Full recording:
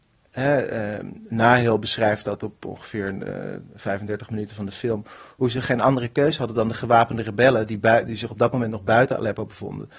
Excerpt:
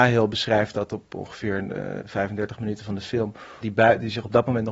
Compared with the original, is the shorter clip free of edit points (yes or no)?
no